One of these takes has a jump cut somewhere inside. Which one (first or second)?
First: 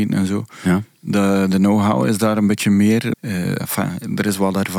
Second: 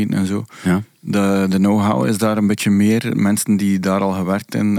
first